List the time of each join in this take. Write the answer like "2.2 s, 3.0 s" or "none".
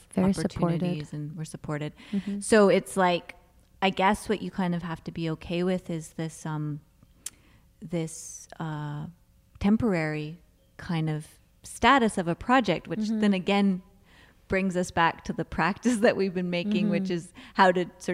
none